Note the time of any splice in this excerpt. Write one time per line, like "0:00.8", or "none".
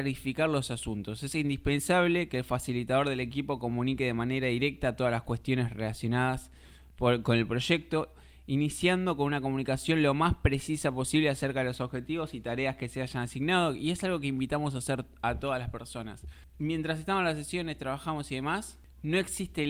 none